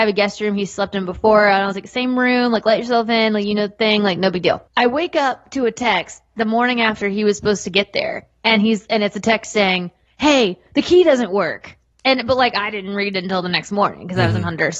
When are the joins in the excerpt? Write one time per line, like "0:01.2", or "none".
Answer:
0:04.7